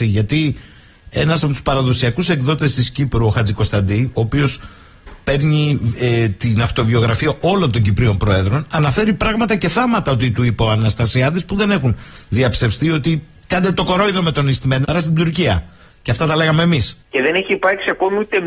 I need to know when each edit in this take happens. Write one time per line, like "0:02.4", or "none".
0:14.8
0:17.0